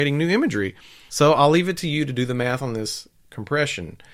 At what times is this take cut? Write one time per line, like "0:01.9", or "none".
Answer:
0:01.1